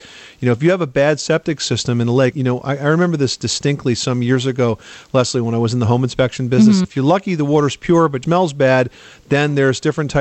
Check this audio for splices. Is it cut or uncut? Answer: cut